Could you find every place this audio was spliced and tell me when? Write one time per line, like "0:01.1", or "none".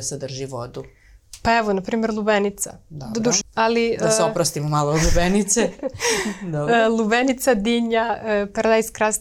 0:03.4

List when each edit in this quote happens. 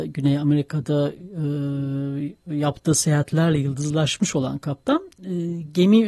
none

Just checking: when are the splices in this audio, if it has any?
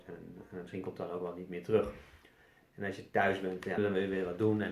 0:02.7
0:03.8

